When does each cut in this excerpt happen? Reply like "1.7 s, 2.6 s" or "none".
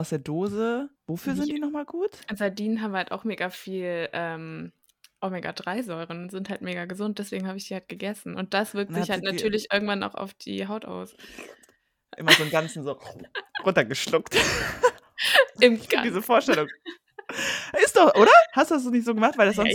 1.0 s